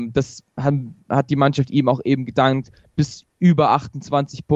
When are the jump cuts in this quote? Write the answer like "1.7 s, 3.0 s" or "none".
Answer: none

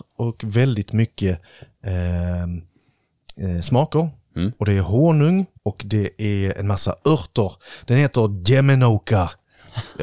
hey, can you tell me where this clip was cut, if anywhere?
5.5 s

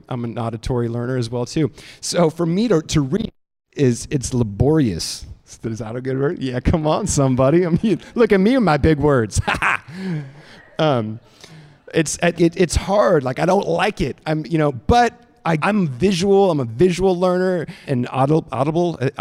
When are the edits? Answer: 12.3 s, 15.6 s, 17.8 s

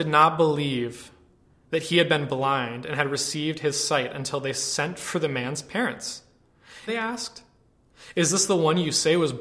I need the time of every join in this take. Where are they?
6.9 s

